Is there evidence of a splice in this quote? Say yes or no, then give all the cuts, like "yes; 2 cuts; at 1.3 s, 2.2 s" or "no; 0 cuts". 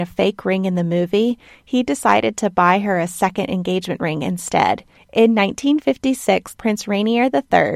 yes; 2 cuts; at 5.0 s, 6.5 s